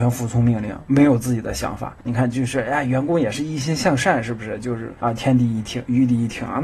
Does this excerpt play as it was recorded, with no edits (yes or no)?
no